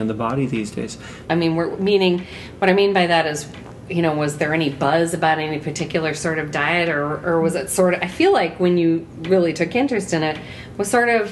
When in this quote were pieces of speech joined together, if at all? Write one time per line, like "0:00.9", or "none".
0:01.2